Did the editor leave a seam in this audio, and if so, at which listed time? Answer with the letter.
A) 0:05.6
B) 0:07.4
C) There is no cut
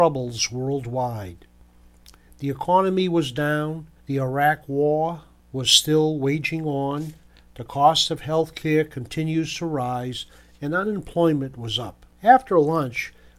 C